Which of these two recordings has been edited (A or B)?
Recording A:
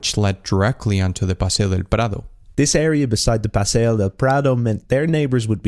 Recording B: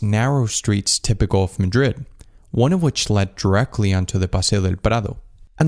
A